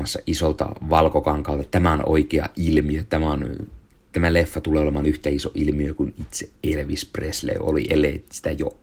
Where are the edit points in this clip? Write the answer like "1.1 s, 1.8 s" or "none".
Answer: none